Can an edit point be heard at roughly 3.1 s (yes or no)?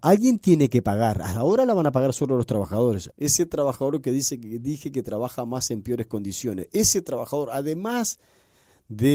yes